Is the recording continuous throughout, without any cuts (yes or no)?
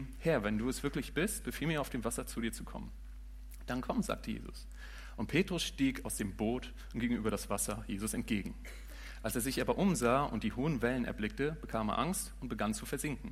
yes